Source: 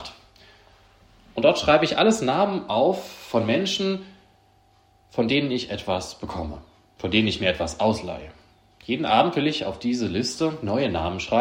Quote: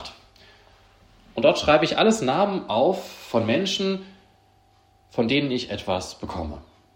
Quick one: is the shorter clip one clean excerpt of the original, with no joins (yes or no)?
yes